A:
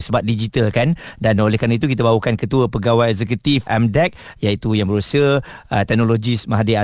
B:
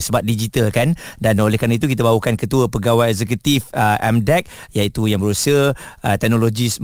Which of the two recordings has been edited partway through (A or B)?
A